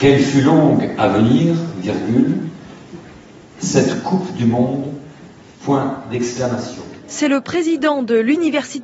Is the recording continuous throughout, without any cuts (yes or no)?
yes